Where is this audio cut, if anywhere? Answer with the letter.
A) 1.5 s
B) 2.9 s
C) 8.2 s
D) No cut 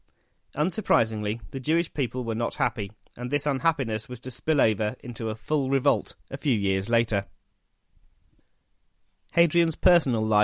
D